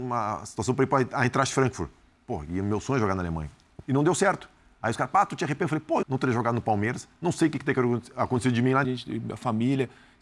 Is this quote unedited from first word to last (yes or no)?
no